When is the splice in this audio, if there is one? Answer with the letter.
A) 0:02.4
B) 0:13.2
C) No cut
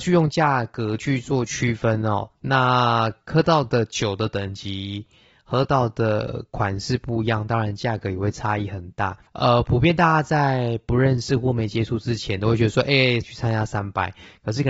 B